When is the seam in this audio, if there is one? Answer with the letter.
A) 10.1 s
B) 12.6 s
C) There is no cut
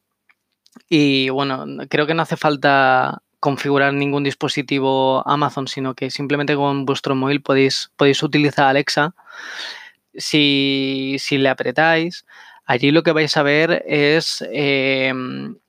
A